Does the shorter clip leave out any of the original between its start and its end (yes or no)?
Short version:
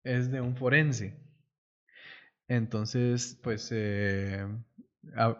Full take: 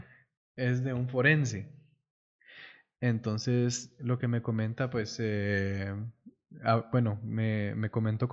yes